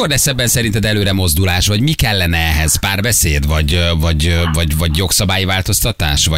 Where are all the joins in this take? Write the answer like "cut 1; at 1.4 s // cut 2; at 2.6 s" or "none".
none